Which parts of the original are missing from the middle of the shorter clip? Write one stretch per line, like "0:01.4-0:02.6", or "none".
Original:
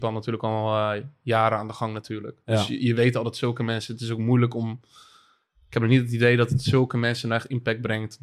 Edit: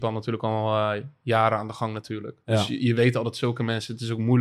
none